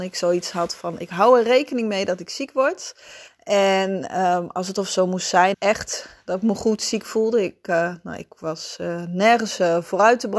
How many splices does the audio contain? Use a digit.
2